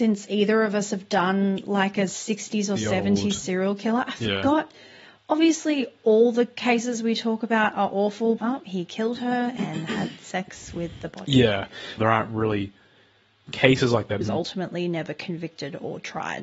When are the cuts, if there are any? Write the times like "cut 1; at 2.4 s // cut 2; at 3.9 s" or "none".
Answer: cut 1; at 8.4 s // cut 2; at 12.0 s // cut 3; at 14.2 s